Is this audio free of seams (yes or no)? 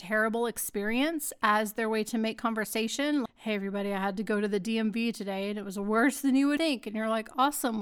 no